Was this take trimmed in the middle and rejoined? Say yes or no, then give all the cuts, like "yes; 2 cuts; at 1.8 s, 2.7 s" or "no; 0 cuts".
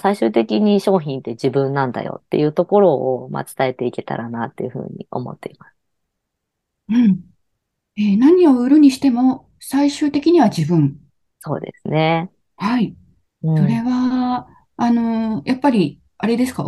no; 0 cuts